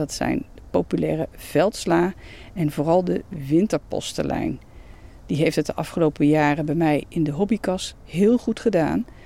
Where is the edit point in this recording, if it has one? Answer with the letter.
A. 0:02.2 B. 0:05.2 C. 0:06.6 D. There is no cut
D